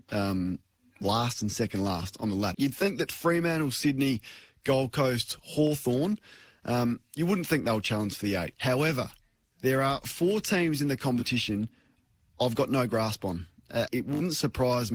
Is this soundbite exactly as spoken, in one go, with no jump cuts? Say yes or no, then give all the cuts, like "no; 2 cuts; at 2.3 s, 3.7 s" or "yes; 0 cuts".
no; 3 cuts; at 2.5 s, 8.5 s, 13.9 s